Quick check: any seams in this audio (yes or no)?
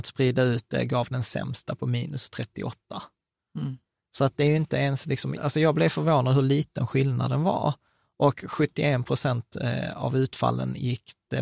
yes